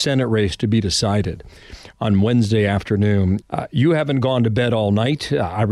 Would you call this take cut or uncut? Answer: cut